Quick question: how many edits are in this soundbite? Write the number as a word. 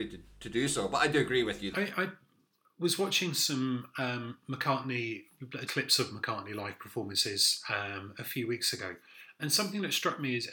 three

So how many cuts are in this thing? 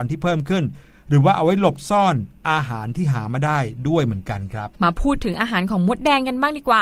one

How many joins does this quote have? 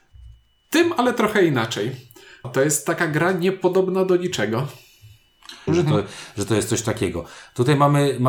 two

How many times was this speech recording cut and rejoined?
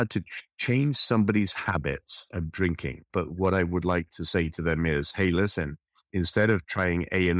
one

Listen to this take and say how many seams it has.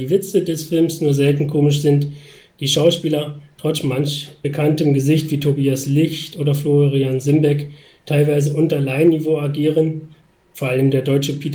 zero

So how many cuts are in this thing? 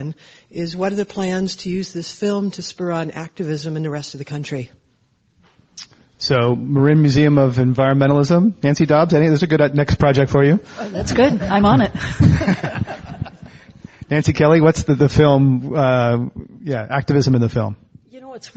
zero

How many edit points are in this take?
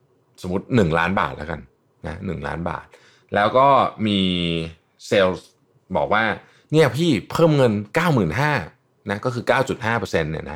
zero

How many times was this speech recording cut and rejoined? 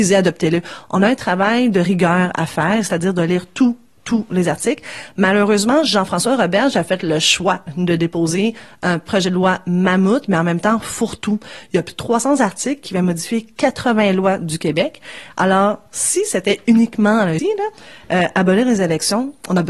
one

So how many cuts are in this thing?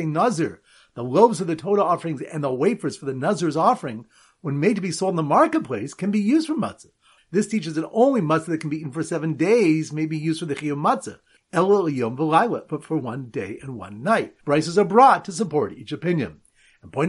three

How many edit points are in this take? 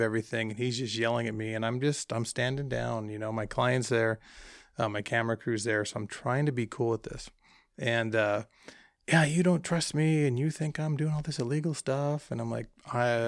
zero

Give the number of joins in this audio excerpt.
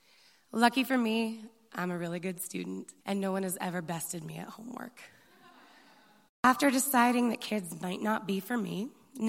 two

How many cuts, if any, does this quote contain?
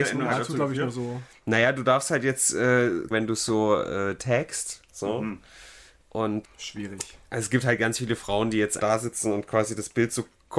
three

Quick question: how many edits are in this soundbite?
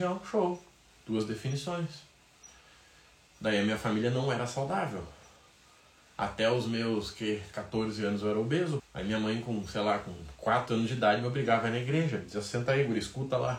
one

